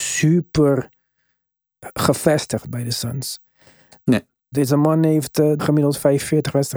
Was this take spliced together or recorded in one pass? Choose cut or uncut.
cut